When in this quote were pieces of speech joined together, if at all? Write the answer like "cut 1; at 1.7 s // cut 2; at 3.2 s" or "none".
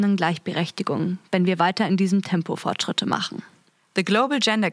none